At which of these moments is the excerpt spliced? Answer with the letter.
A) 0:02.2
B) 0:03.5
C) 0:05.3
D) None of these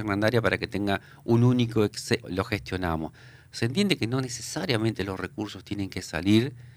A